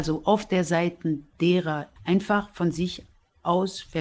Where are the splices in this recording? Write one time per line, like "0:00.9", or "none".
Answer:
0:02.0